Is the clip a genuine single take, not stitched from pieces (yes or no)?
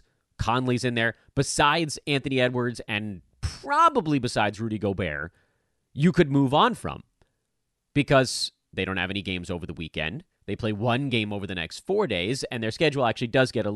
yes